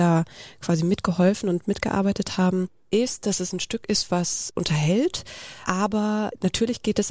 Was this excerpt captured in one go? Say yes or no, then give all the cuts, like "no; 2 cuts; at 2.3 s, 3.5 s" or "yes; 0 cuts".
no; 1 cut; at 4.5 s